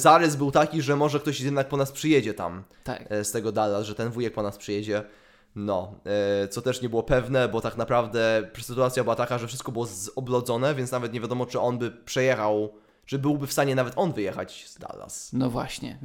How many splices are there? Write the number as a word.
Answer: zero